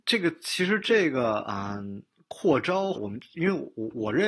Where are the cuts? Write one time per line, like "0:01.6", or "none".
0:02.9